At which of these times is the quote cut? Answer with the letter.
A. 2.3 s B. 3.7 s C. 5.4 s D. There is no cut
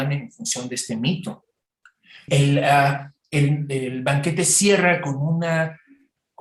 A